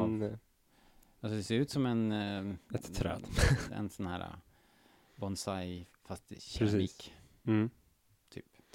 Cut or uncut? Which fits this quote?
cut